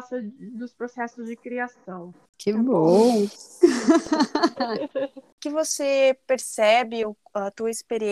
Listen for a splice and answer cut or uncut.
uncut